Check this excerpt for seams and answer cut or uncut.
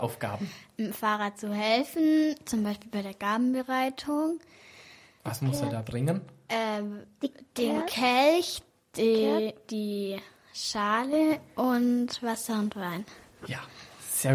uncut